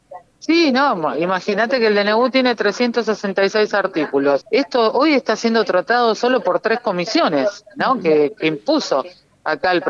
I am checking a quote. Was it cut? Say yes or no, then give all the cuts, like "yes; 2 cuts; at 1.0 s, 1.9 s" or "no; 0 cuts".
yes; 2 cuts; at 4.4 s, 8.4 s